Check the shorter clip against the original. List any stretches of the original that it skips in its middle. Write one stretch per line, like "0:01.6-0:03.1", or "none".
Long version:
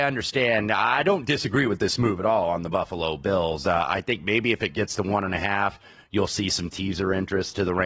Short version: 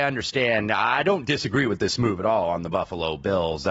none